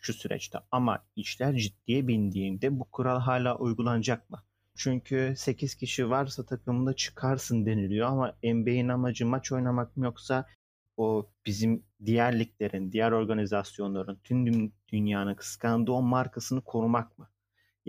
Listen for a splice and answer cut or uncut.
cut